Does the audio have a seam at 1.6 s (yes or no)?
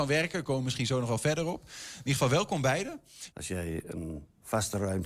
no